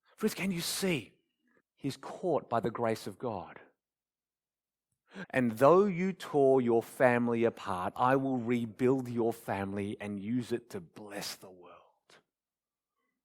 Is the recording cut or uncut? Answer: cut